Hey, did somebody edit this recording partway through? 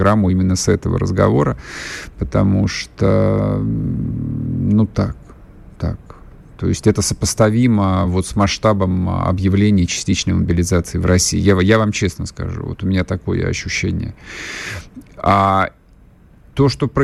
no; 0 cuts

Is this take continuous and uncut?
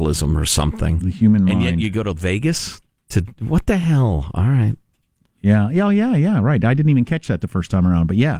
yes; 0 cuts

